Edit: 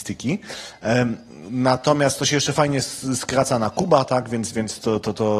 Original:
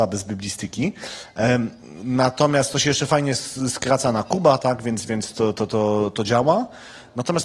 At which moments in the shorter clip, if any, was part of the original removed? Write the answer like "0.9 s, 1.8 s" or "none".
none